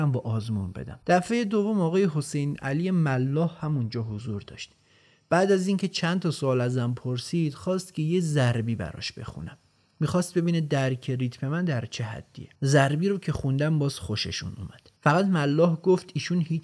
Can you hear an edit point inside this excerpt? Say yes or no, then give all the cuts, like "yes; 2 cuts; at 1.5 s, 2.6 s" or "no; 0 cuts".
yes; 3 cuts; at 1.0 s, 12.6 s, 15.0 s